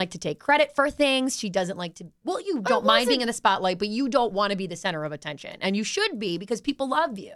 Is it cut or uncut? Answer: cut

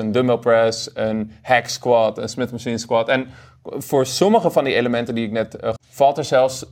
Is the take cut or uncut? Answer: cut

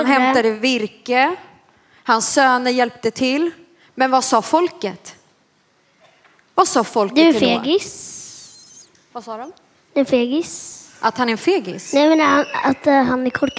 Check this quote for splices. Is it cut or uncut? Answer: uncut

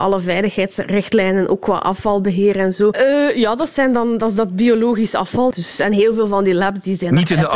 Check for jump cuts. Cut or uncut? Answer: cut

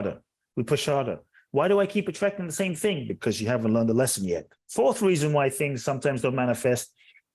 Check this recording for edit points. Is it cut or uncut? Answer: cut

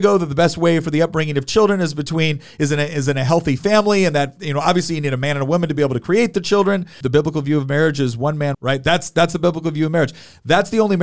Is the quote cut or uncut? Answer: cut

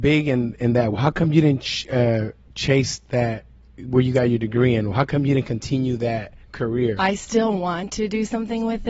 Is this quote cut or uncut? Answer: uncut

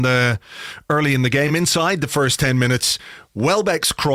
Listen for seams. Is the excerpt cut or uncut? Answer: uncut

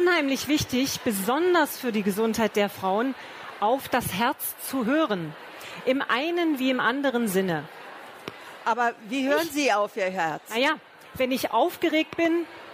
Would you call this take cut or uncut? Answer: uncut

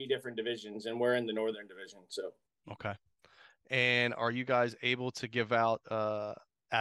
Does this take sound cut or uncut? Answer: uncut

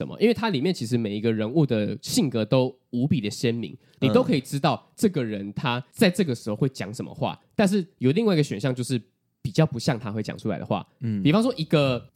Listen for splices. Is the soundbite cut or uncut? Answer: uncut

